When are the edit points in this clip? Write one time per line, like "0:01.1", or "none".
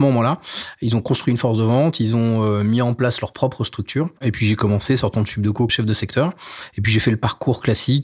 0:04.2
0:05.7